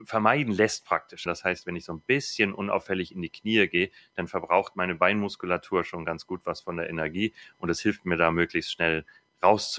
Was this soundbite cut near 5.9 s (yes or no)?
no